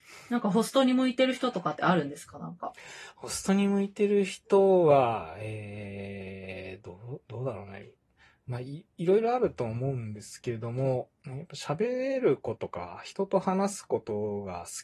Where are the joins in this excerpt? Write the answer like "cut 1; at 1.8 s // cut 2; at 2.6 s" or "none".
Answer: cut 1; at 12.6 s